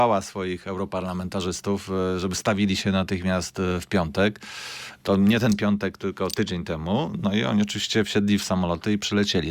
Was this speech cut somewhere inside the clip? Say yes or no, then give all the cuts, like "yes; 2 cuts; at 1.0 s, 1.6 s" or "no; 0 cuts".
no; 0 cuts